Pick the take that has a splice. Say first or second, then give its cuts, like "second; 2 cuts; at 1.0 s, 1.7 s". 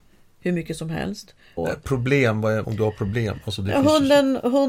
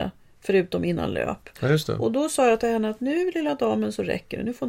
first; 2 cuts; at 1.6 s, 2.6 s